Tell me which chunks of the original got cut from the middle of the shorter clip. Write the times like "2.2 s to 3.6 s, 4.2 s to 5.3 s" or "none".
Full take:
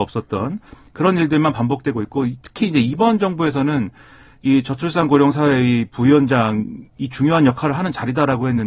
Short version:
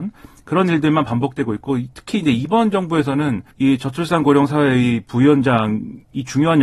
4.0 s to 4.4 s